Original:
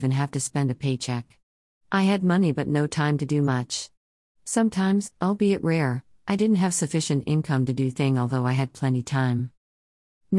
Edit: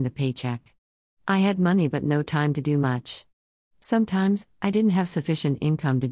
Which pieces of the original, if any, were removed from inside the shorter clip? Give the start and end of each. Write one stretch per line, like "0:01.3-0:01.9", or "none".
0:05.1-0:06.2